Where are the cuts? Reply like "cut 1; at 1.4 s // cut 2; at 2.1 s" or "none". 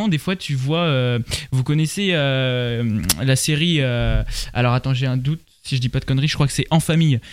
none